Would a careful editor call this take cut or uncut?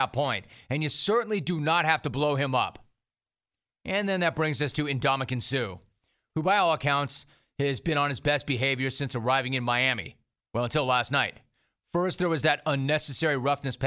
uncut